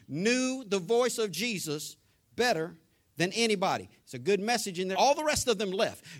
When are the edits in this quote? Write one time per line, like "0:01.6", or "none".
0:04.9